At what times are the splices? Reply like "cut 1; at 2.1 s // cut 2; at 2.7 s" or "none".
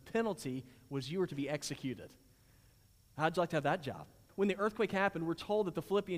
cut 1; at 4.3 s

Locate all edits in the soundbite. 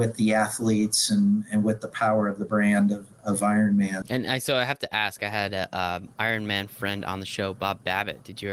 cut 1; at 4.0 s

